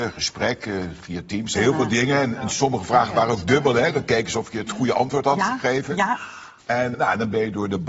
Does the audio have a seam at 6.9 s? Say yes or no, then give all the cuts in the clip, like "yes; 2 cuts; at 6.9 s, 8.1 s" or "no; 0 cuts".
yes; 2 cuts; at 1.5 s, 6.9 s